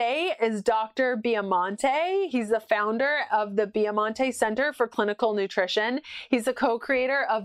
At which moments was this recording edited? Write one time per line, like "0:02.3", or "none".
none

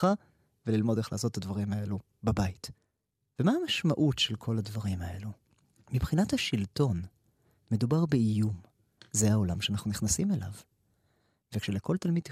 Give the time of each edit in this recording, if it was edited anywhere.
0:09.0

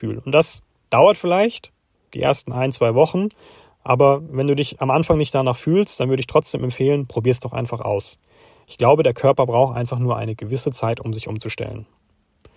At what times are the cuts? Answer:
none

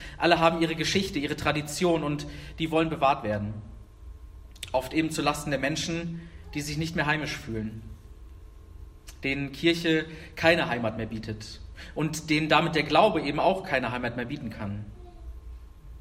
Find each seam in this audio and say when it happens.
none

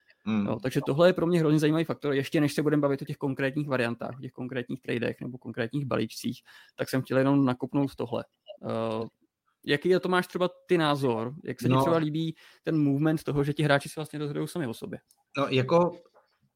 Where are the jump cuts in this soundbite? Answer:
none

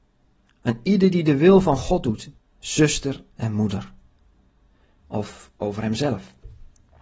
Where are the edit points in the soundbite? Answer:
0:02.4
0:05.0

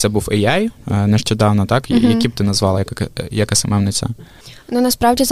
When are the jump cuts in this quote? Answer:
none

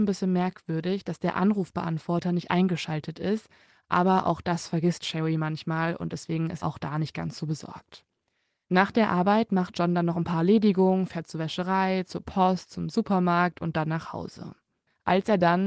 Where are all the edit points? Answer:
0:06.6

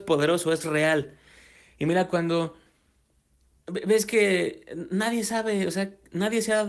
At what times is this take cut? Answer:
none

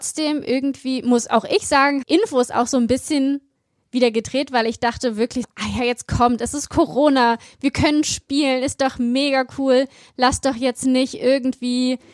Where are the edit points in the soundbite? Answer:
0:02.0
0:05.4

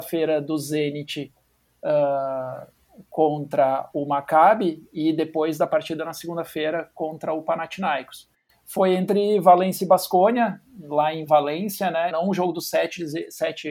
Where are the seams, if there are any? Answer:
0:08.5
0:12.1

